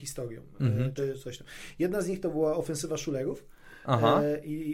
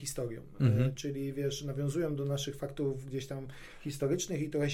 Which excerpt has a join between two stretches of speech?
first; 1 cut; at 1.0 s

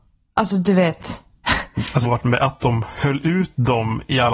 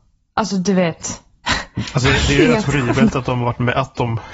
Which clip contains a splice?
first; 1 cut; at 2.0 s

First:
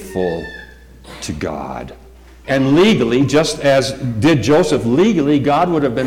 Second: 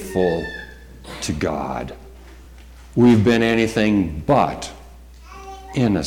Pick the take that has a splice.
first; 1 cut; at 2.4 s

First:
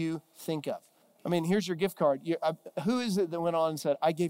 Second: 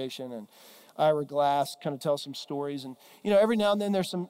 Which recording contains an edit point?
first; 1 cut; at 1.0 s

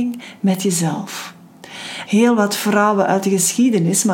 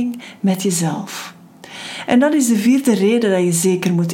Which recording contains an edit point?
first; 1 cut; at 2.1 s

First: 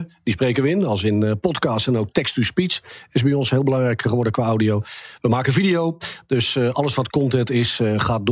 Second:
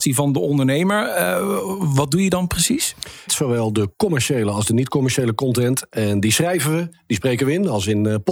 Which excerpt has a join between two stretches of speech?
second; 1 cut; at 3.3 s

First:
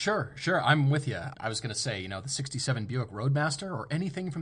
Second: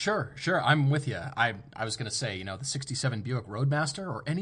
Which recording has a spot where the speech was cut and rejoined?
first; 1 cut; at 1.3 s

